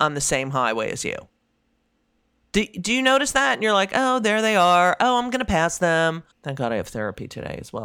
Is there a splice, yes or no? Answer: yes